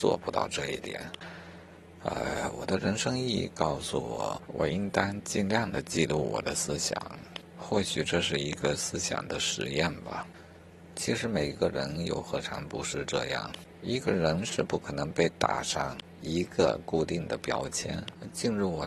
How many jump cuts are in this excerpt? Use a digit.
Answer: 0